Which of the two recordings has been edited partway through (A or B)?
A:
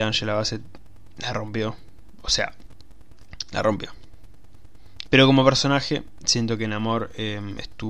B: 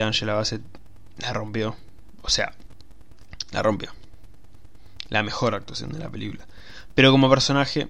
A